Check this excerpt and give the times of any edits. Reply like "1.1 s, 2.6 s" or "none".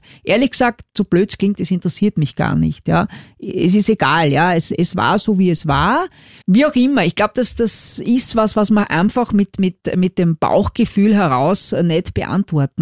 6.4 s